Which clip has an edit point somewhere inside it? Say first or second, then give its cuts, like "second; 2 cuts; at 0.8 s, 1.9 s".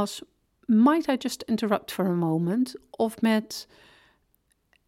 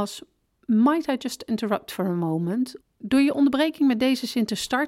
second; 1 cut; at 2.8 s